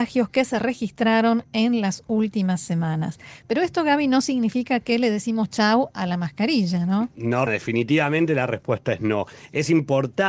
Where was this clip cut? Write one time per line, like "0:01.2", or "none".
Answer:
0:07.5